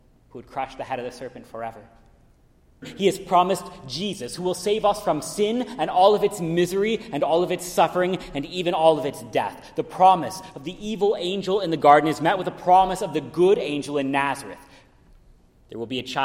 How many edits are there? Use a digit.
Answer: 1